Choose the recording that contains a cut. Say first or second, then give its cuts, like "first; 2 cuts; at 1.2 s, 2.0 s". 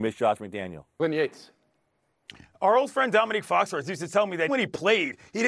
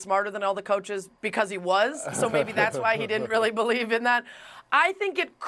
first; 1 cut; at 4.5 s